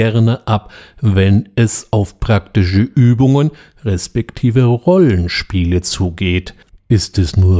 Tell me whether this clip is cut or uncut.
cut